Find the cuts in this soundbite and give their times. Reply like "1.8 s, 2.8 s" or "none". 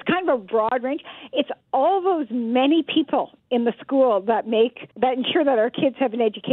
4.9 s